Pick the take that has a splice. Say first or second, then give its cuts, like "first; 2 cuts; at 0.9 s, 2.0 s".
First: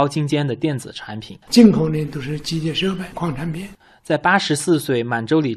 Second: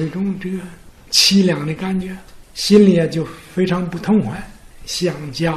first; 2 cuts; at 1.5 s, 3.1 s